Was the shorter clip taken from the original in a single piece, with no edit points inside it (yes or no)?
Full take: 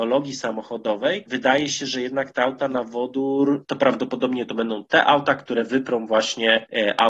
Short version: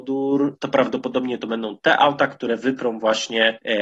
yes